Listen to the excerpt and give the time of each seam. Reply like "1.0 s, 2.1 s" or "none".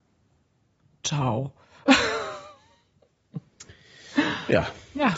none